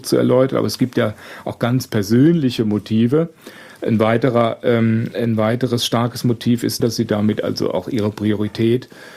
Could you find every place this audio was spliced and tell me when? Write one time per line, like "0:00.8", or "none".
0:03.8
0:06.8